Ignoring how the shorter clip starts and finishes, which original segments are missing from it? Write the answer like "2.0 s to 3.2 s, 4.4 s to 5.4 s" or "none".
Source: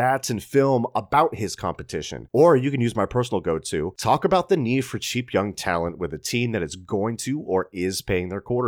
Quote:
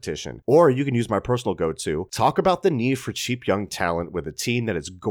none